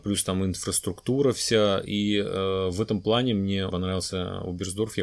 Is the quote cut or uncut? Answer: cut